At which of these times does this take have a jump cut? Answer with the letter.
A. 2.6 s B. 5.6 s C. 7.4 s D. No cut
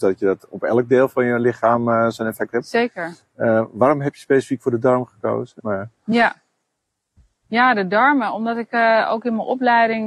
B